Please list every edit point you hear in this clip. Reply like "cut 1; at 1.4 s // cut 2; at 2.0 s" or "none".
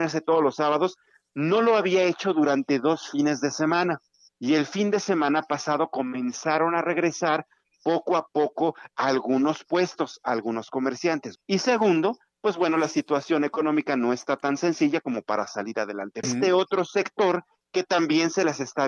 cut 1; at 11.4 s // cut 2; at 16.2 s